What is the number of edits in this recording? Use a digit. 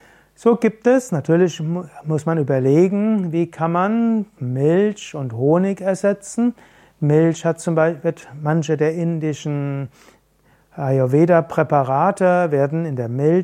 0